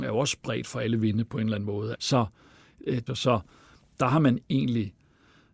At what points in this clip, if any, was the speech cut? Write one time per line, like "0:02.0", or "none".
0:01.9
0:03.1